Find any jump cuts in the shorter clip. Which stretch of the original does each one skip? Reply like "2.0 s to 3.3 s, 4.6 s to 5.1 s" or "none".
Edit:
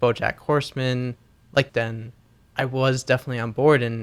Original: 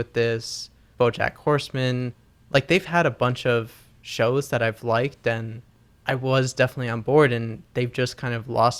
2.7 s to 5.2 s